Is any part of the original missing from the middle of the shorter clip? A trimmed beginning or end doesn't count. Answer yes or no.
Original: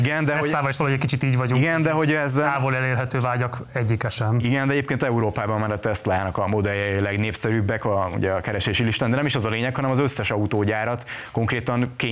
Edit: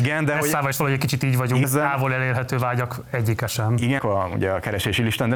yes